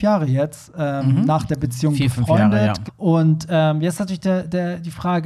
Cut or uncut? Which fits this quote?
cut